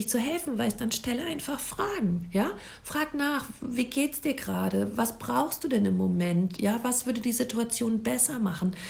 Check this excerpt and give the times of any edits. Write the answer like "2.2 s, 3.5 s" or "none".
none